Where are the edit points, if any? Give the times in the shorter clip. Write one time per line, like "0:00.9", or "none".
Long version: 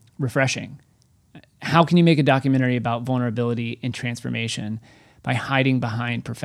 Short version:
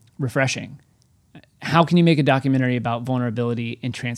none